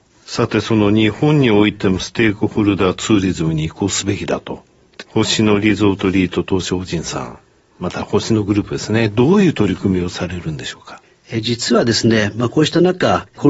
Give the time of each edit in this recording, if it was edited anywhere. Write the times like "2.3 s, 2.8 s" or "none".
5.0 s